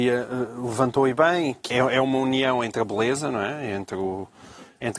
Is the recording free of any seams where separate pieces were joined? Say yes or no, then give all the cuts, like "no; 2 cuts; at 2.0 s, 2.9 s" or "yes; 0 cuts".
no; 1 cut; at 1.7 s